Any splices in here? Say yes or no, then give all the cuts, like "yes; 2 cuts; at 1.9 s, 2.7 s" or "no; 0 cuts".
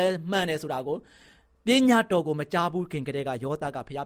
no; 0 cuts